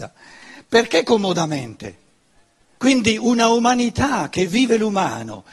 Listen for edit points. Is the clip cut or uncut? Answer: cut